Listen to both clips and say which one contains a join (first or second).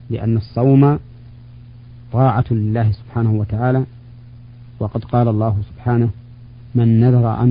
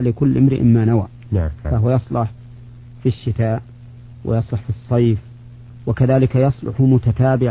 second